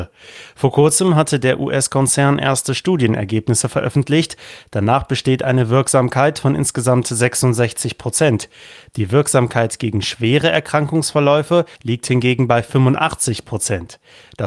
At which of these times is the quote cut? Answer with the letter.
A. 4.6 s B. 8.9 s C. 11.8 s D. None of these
C